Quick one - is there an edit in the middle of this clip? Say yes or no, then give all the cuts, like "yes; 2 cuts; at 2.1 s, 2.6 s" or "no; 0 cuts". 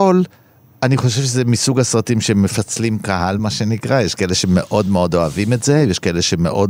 no; 0 cuts